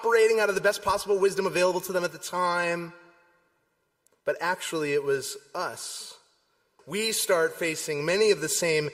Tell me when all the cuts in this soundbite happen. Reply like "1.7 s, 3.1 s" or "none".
4.2 s, 6.8 s